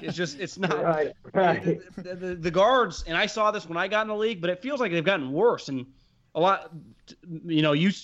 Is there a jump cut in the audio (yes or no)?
no